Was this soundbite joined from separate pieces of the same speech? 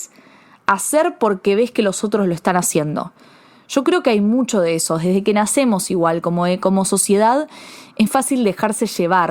yes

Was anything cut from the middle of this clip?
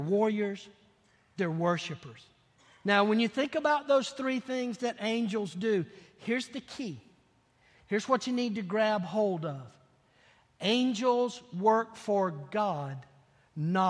no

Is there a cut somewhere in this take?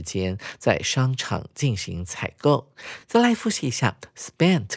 no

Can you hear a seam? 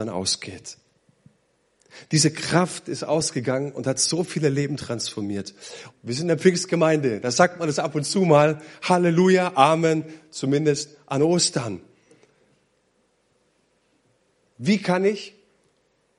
yes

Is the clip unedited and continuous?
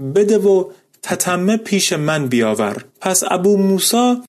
no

